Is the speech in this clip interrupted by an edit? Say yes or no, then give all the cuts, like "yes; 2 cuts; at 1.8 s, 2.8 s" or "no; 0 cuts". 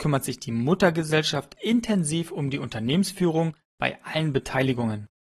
no; 0 cuts